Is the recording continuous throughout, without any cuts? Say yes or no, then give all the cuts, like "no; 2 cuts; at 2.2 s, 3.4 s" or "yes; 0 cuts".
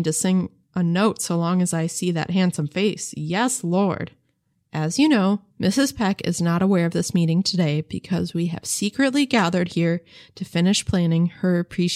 no; 1 cut; at 4.5 s